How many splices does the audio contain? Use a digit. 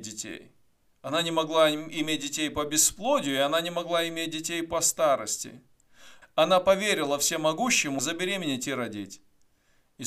2